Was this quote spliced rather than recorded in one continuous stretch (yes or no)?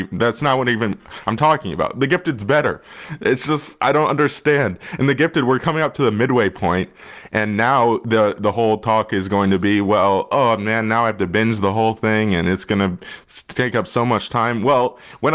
no